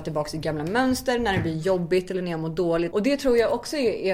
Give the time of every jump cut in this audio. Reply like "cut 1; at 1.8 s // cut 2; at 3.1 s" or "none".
cut 1; at 2.9 s